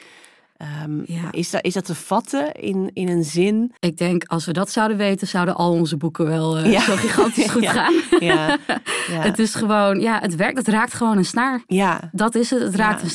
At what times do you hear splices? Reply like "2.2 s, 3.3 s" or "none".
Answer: 3.8 s